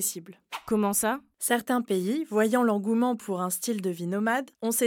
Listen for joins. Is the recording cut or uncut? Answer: uncut